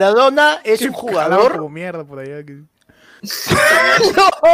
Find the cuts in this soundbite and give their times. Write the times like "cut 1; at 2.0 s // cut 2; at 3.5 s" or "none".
cut 1; at 3.2 s